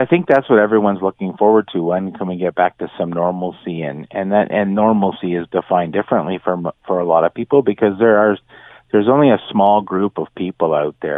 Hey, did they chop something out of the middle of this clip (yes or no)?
no